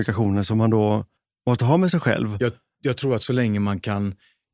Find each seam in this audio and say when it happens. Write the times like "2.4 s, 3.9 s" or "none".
none